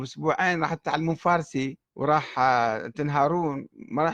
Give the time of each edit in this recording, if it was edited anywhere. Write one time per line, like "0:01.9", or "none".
0:01.8